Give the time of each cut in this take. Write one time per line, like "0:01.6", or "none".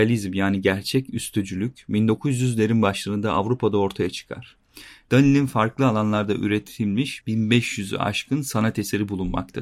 0:05.0